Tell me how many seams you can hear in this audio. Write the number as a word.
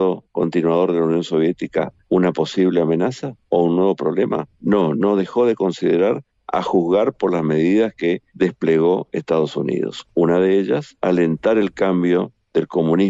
zero